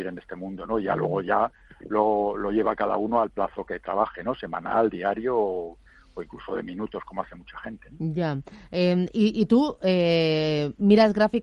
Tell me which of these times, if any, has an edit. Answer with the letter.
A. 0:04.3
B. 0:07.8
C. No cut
C